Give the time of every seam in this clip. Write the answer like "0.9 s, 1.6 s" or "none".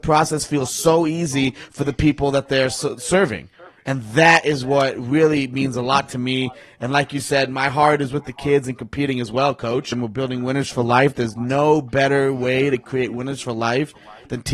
9.9 s

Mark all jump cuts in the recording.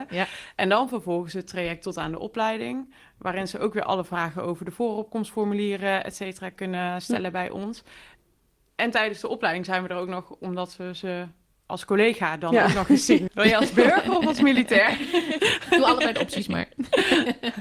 13.3 s, 15.4 s

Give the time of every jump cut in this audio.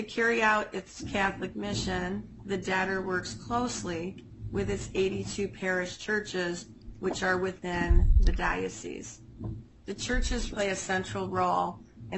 10.5 s

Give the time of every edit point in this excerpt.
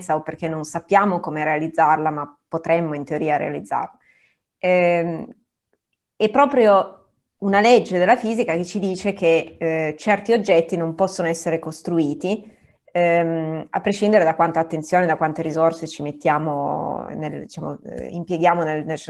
17.1 s

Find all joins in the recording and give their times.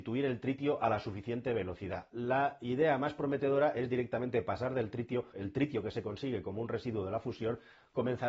2.1 s, 5.3 s

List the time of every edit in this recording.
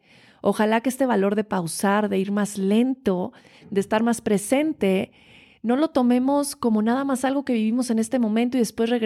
none

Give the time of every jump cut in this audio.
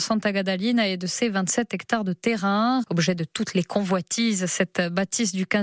2.8 s

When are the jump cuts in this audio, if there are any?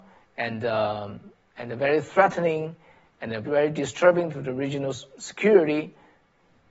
3.4 s

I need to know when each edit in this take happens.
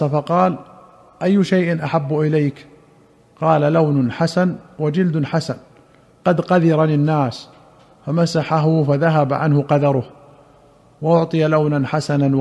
none

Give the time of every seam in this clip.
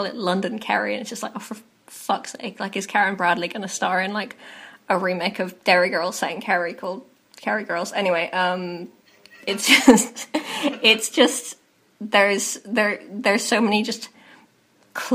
none

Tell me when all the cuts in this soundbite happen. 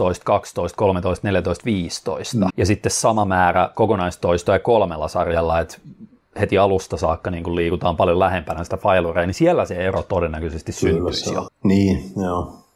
2.5 s, 11.5 s

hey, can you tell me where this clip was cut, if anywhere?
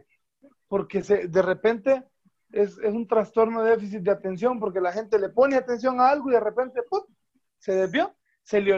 none

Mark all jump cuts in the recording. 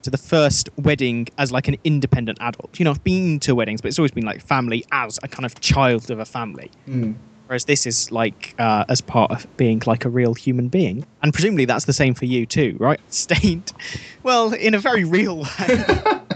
11.0 s, 13.0 s

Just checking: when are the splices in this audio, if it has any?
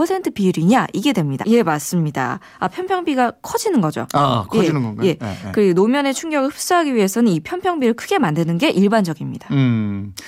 1.4 s

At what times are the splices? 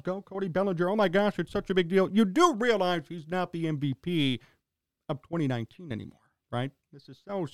none

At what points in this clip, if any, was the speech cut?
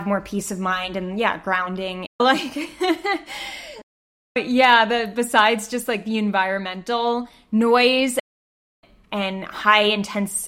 2.1 s

